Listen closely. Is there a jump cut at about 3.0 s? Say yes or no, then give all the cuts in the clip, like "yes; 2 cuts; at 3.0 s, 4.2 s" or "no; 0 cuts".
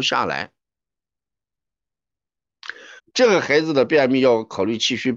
yes; 1 cut; at 3.0 s